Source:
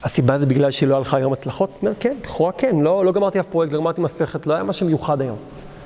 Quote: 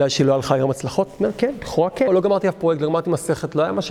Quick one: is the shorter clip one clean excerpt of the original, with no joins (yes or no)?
no